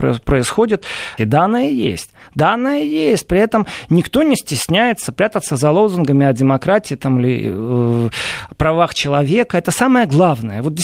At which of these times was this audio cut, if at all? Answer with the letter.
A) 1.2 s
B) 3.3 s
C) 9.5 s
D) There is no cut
A